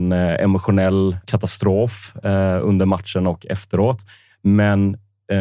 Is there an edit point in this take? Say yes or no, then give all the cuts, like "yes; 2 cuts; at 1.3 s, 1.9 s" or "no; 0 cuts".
yes; 1 cut; at 1.2 s